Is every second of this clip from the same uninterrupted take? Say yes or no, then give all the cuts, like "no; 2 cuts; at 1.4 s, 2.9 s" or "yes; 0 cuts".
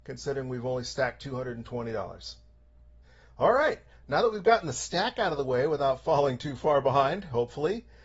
yes; 0 cuts